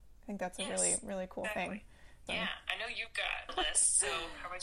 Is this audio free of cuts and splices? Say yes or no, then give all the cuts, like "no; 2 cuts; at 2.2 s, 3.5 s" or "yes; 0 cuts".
no; 2 cuts; at 2.3 s, 3.5 s